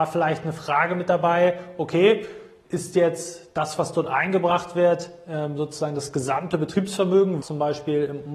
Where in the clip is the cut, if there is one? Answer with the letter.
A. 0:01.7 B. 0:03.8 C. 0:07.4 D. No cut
C